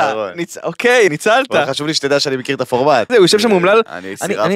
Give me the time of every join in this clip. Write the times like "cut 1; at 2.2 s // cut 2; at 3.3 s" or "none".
cut 1; at 1.1 s // cut 2; at 3.1 s